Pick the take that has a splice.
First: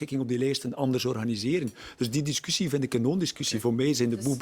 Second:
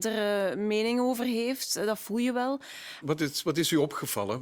second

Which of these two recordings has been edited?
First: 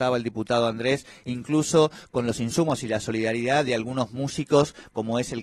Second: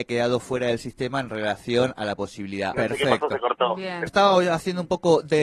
second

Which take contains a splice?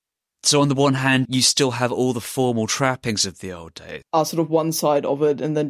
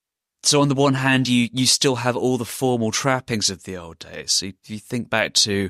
first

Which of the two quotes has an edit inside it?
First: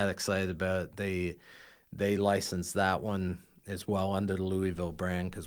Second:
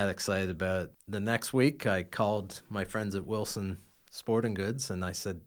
second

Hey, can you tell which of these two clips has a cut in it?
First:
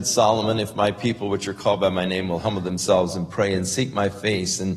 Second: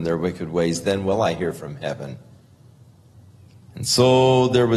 second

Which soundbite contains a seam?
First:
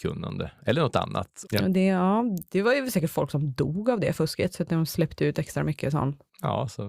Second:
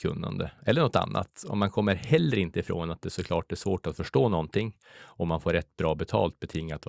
first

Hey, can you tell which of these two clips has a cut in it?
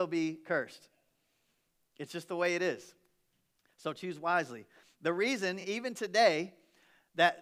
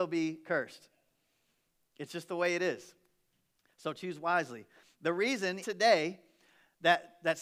second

